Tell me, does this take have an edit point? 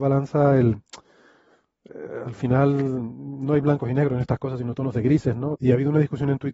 yes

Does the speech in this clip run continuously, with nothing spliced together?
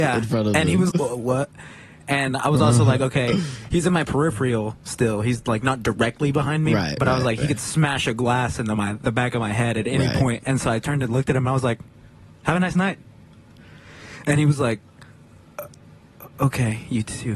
no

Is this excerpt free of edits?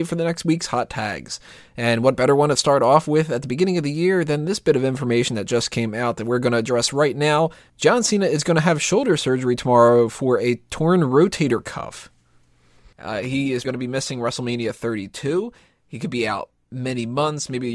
no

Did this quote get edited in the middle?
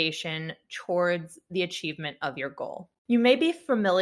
yes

